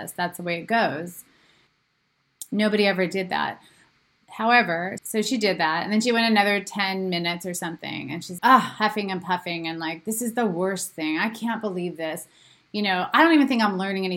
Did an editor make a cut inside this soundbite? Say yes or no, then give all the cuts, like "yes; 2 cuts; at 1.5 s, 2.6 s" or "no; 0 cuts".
yes; 2 cuts; at 5.0 s, 8.4 s